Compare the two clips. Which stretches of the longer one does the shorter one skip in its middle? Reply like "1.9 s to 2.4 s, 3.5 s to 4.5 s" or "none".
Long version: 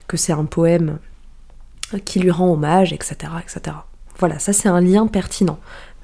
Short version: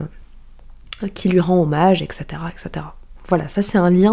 none